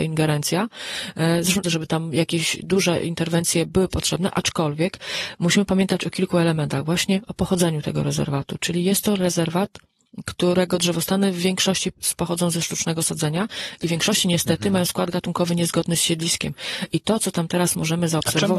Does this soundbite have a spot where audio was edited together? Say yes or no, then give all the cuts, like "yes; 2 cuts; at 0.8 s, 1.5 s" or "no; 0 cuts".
yes; 1 cut; at 1.6 s